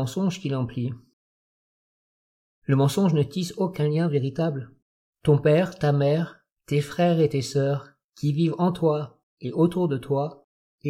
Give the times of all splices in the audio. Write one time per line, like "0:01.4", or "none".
0:05.1